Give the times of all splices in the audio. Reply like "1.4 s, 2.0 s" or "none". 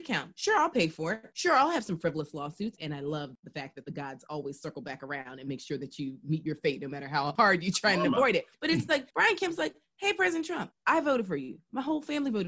2.8 s